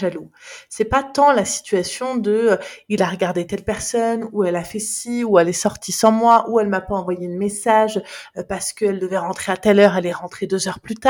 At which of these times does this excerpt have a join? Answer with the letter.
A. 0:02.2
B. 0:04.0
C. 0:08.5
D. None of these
D